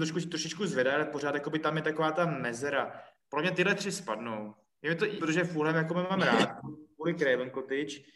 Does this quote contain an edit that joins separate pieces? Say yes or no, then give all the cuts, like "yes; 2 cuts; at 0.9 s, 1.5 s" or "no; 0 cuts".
yes; 2 cuts; at 3.3 s, 5.2 s